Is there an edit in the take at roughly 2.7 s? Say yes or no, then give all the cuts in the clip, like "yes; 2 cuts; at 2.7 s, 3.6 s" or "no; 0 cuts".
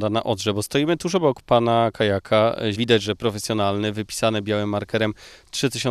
yes; 1 cut; at 2.7 s